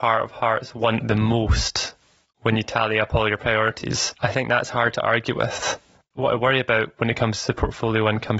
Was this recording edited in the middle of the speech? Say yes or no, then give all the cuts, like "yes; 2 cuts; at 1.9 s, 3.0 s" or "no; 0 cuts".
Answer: no; 0 cuts